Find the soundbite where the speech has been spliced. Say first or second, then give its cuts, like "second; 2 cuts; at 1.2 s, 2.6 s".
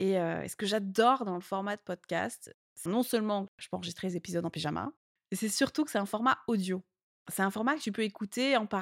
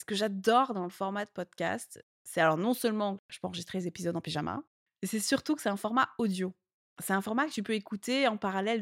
first; 1 cut; at 2.9 s